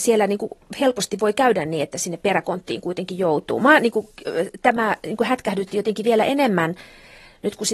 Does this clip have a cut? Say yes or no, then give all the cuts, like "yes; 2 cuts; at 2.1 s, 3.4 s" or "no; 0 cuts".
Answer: no; 0 cuts